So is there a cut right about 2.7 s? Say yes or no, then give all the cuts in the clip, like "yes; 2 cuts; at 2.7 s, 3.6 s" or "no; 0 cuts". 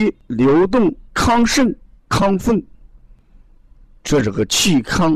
no; 1 cut; at 1.1 s